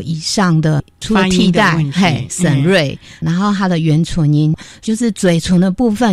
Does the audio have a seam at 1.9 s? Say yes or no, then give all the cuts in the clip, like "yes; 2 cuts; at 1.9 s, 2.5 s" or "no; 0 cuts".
no; 0 cuts